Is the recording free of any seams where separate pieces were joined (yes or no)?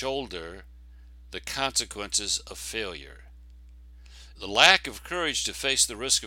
no